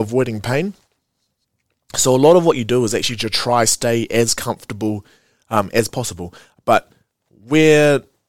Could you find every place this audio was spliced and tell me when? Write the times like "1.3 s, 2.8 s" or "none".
none